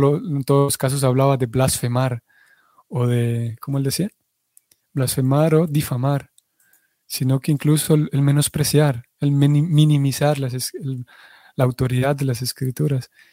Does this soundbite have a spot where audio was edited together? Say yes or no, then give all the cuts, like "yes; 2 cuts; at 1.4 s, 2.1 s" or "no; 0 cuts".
no; 0 cuts